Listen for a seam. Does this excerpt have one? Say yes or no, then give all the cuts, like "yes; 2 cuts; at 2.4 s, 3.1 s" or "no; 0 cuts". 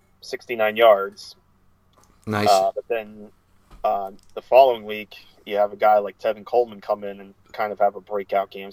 no; 0 cuts